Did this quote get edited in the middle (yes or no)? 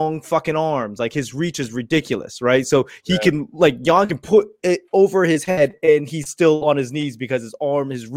no